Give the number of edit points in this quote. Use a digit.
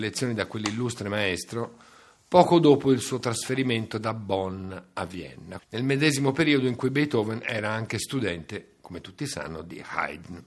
1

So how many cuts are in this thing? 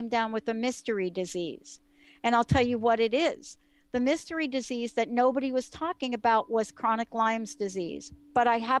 0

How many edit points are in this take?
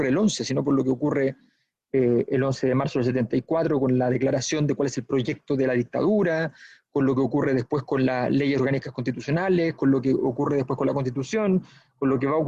0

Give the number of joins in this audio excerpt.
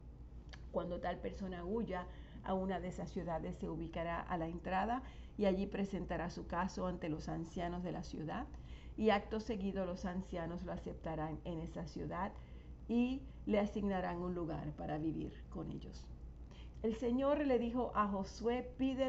1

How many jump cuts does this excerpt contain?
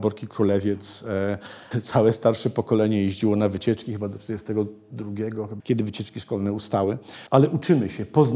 3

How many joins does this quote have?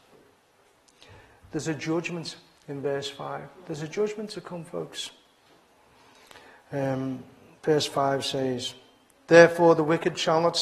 0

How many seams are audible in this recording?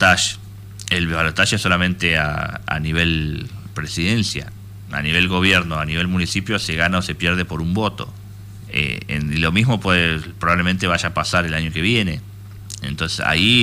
1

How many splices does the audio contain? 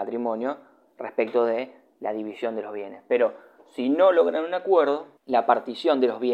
1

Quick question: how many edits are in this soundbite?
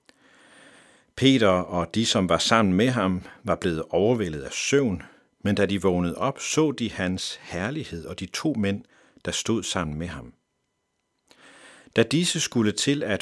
0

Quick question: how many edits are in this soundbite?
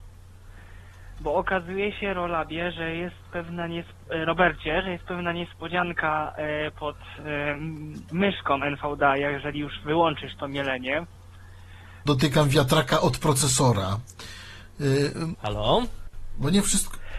2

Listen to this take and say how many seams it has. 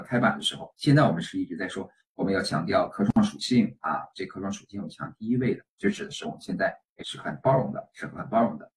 2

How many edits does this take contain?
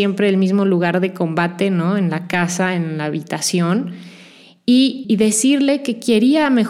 1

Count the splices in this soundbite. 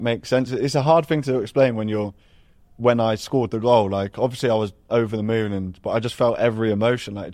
0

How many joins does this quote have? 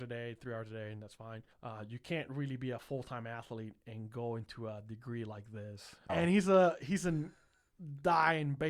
2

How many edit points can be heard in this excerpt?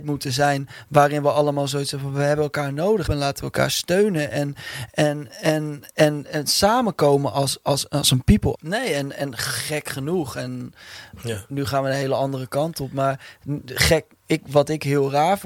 2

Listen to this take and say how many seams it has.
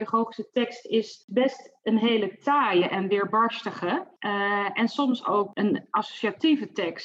1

